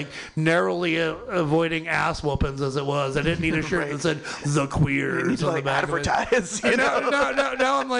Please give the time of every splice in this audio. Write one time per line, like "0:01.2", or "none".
none